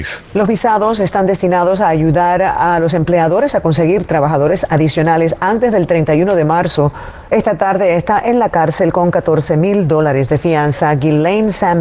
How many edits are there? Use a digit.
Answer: 1